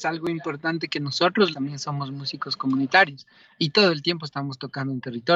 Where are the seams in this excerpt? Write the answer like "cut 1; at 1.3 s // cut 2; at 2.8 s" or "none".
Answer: cut 1; at 1.5 s

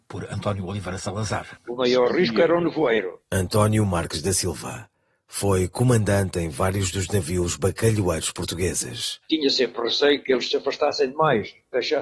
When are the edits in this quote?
cut 1; at 1.6 s // cut 2; at 3.2 s

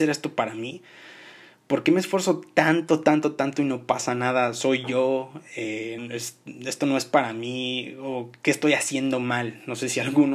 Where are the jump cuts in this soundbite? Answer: cut 1; at 6.0 s

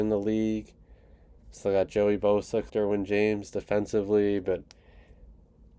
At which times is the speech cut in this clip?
cut 1; at 1.4 s // cut 2; at 2.7 s

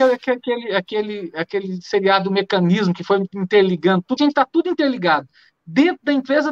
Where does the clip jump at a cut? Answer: cut 1; at 4.2 s

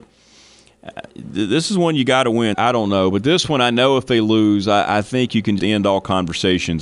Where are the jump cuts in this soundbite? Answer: cut 1; at 2.5 s // cut 2; at 5.6 s

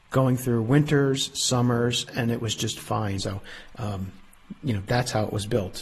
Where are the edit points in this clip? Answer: cut 1; at 3.2 s

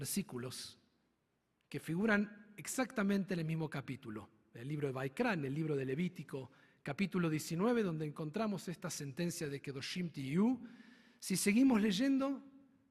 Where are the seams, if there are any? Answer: none

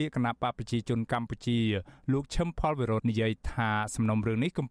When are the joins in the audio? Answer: cut 1; at 3.0 s

